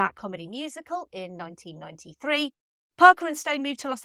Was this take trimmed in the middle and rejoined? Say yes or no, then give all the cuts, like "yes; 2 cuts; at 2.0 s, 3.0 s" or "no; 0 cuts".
yes; 1 cut; at 1.1 s